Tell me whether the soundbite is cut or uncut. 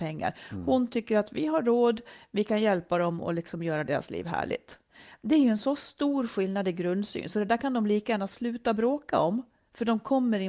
uncut